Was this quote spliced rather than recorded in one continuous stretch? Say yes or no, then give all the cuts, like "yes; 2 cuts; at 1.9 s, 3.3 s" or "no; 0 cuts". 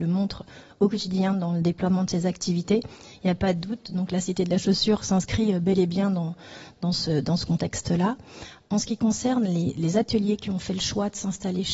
no; 0 cuts